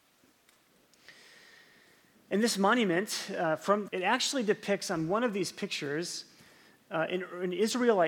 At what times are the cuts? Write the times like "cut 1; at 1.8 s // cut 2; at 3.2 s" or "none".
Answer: cut 1; at 3.9 s